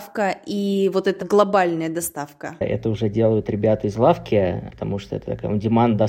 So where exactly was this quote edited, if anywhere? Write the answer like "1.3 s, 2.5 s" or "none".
1.2 s

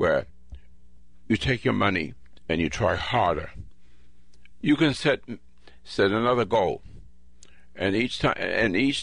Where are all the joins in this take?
4.6 s

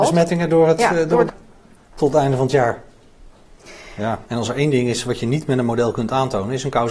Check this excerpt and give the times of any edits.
1.3 s, 4.2 s

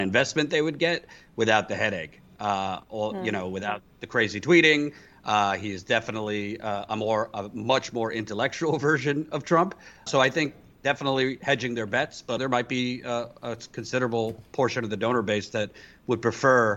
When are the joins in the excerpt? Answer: 10.1 s, 12.4 s

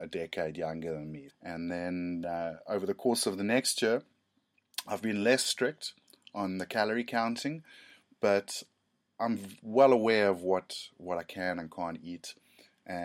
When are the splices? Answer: 1.3 s

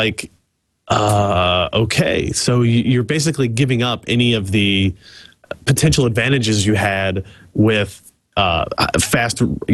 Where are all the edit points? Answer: none

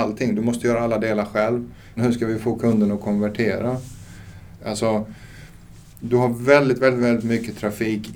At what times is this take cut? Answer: 2.0 s, 4.6 s

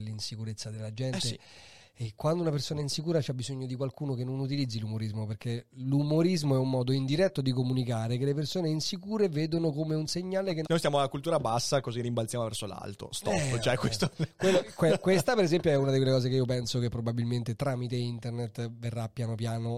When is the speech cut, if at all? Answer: 10.6 s

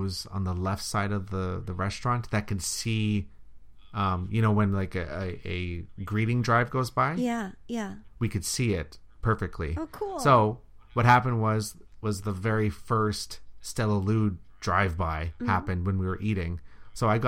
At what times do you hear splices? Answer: none

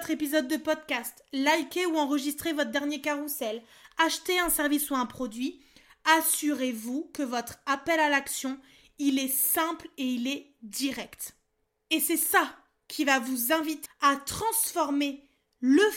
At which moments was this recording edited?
13.9 s

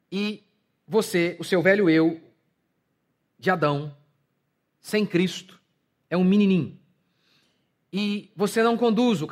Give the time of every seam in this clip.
none

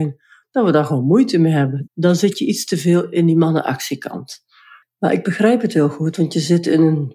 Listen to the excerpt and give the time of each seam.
1.9 s, 4.8 s

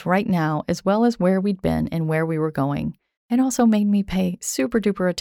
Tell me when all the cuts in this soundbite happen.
3.2 s

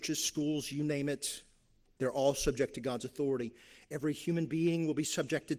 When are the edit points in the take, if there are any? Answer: none

